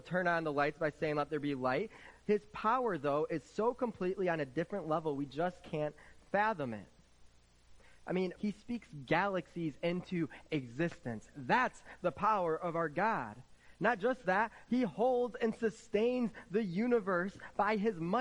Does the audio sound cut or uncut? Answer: cut